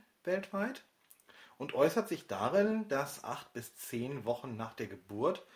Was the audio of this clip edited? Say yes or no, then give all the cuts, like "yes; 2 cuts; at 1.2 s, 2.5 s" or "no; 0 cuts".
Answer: no; 0 cuts